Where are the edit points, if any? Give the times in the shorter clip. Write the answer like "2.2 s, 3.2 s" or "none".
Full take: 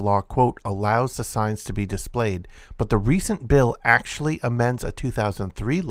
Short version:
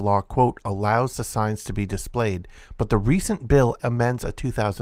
3.8 s